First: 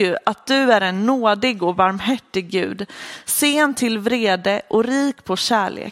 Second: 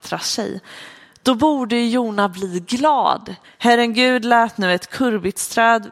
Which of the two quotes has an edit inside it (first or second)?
second